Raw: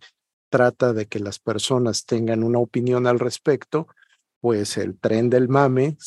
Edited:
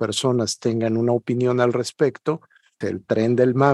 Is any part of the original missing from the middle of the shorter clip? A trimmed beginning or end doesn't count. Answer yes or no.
yes